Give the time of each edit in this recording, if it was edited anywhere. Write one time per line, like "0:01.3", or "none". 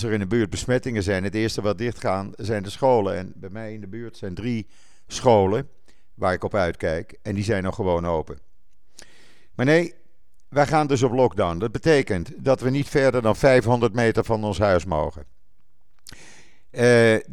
none